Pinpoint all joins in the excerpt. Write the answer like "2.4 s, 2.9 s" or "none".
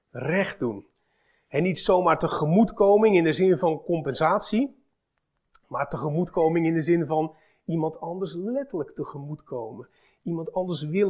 none